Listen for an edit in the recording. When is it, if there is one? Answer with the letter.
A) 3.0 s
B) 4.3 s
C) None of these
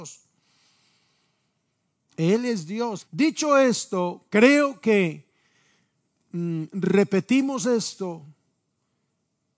A